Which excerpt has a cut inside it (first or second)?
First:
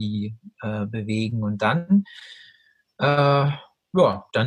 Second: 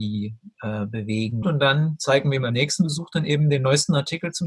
second